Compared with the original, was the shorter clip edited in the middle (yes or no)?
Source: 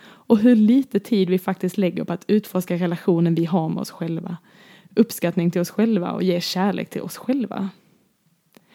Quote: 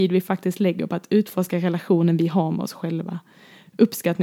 no